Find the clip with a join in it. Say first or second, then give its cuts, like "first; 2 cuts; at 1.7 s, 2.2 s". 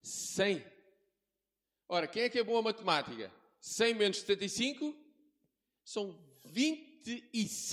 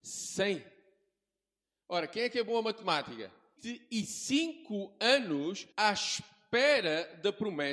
second; 2 cuts; at 3.6 s, 5.7 s